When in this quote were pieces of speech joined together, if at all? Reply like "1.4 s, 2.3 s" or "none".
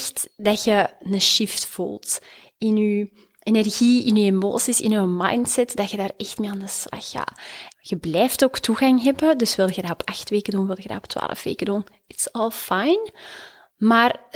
7.7 s